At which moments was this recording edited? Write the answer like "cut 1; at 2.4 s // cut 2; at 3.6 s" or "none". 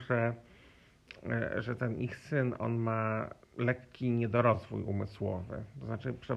cut 1; at 3.4 s